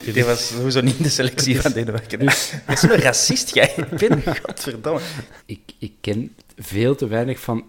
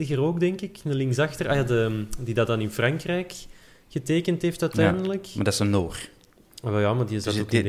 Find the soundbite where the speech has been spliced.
first; 2 cuts; at 2.2 s, 5.4 s

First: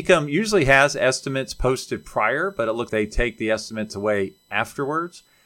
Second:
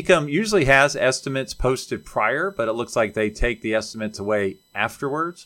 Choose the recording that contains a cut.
first; 1 cut; at 2.9 s

